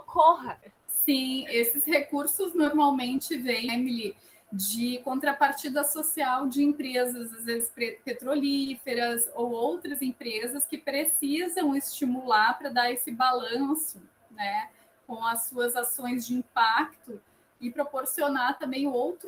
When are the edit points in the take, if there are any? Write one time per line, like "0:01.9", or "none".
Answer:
0:03.7